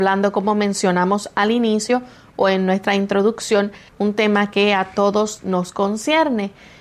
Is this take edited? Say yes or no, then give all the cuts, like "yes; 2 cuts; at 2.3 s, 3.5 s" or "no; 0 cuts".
yes; 1 cut; at 3.9 s